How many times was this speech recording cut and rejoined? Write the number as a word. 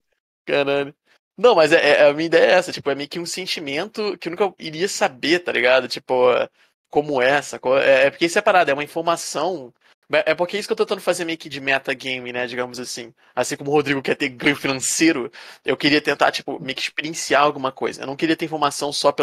zero